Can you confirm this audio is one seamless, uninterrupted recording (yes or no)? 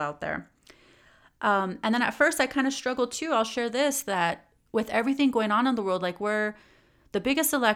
yes